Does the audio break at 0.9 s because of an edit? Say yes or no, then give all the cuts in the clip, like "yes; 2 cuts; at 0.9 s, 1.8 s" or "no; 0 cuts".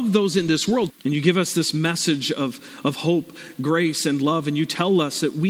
yes; 1 cut; at 0.9 s